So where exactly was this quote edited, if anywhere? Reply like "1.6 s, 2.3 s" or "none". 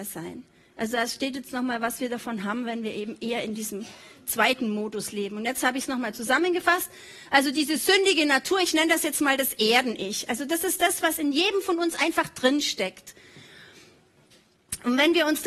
none